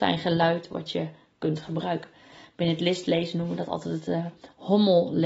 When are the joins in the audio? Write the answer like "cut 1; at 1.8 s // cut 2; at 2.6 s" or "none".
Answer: none